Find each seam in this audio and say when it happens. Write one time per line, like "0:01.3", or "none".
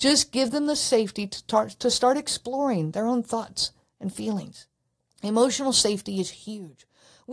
0:05.0